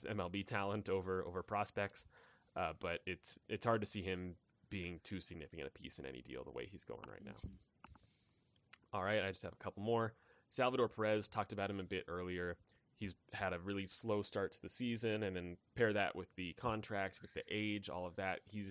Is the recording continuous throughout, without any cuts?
yes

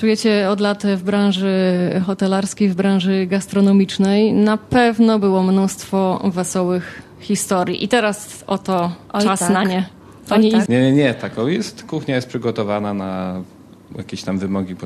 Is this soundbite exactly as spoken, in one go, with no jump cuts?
no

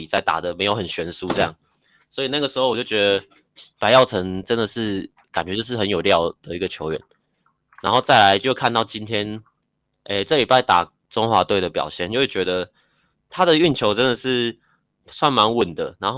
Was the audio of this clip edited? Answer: no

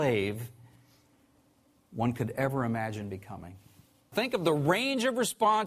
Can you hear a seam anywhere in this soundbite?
yes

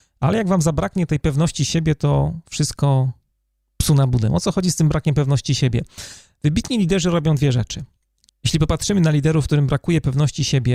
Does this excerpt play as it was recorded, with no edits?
no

